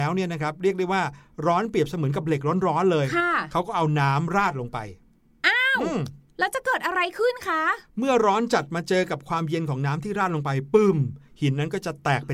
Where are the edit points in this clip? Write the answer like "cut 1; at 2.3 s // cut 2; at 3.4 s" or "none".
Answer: none